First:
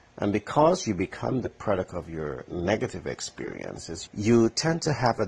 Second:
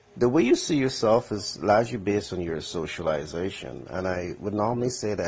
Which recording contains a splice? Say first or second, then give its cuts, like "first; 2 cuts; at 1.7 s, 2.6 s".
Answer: first; 1 cut; at 4.1 s